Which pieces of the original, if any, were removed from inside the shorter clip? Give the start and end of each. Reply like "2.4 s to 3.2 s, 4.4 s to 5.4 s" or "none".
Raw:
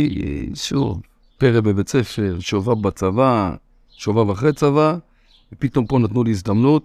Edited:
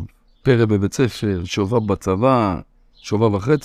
none